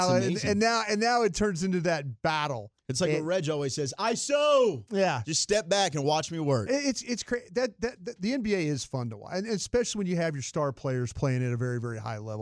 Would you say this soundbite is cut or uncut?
uncut